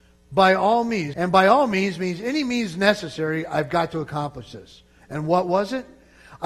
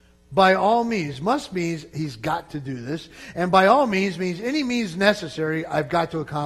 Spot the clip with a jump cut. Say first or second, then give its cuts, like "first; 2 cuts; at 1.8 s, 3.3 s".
first; 1 cut; at 1.1 s